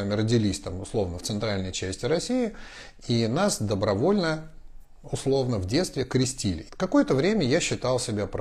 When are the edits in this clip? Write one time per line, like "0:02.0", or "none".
0:06.7